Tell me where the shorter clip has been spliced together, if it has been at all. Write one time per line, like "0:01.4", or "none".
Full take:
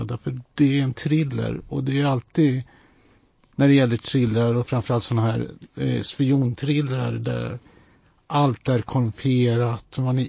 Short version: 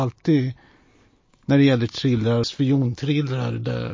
0:02.4